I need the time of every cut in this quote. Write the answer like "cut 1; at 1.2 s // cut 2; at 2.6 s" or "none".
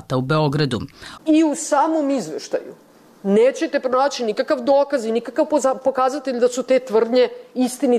cut 1; at 1.2 s